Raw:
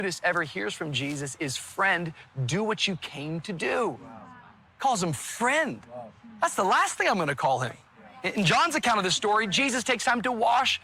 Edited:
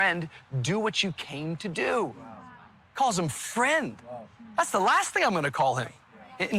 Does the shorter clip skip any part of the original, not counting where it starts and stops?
no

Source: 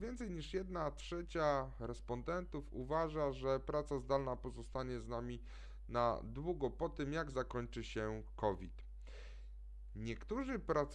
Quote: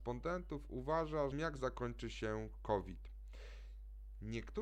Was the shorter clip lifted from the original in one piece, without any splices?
no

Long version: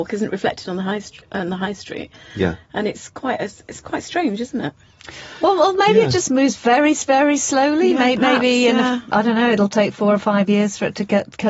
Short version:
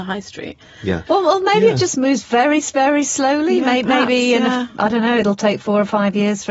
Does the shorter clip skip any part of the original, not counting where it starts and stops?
yes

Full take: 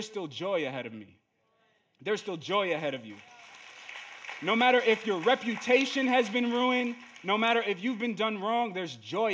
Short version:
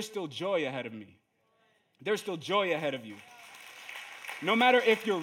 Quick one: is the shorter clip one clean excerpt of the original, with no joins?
yes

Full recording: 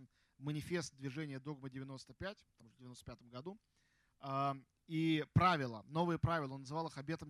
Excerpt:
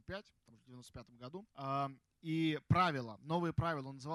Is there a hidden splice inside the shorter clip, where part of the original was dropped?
yes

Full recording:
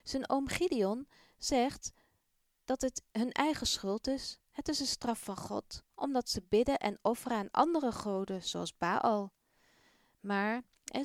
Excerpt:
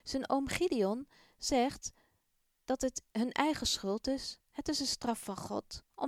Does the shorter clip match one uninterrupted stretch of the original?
yes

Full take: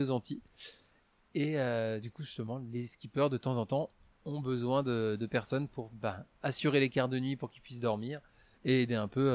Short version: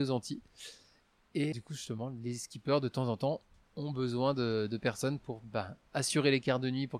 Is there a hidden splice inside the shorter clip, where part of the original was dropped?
yes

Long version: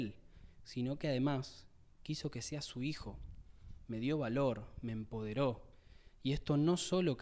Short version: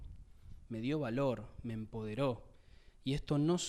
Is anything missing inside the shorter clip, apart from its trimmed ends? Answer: no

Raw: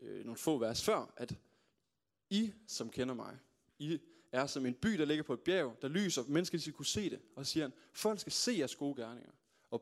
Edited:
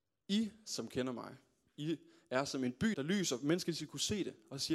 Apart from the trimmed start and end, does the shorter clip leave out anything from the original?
yes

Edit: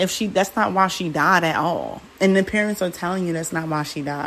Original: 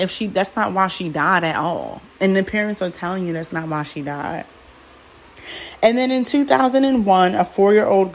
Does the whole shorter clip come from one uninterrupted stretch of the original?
yes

